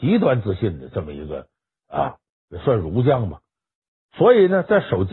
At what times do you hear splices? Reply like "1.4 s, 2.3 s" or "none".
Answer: 4.0 s